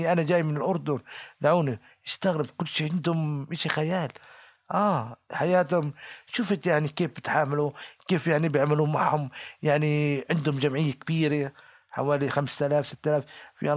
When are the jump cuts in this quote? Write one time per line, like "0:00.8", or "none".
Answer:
none